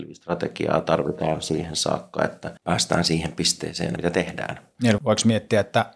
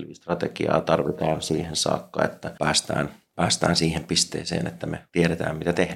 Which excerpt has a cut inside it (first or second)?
first